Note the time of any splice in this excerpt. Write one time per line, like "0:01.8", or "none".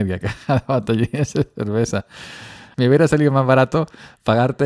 0:02.7